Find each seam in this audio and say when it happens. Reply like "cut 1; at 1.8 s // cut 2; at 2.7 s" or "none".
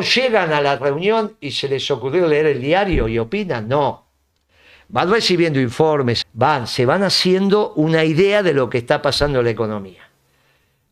cut 1; at 6.2 s